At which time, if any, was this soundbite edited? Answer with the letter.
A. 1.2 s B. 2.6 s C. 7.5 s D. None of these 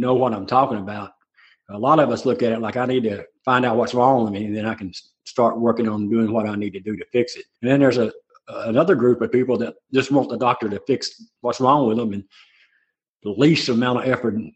C